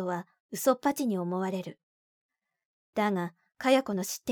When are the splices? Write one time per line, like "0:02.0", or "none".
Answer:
0:02.7